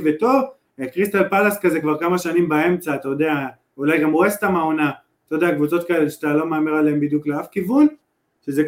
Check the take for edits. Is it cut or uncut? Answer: uncut